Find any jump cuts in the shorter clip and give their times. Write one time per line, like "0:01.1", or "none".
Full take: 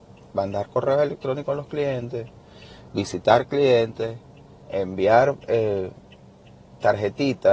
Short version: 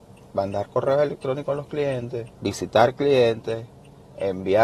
0:02.4